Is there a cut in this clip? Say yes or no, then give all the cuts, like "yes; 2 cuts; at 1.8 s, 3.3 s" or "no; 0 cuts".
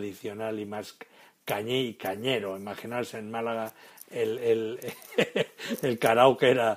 no; 0 cuts